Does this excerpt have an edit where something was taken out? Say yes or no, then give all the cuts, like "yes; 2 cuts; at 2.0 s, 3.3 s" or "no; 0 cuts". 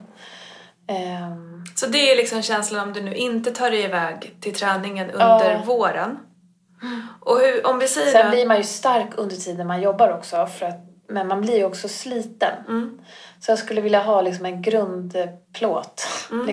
no; 0 cuts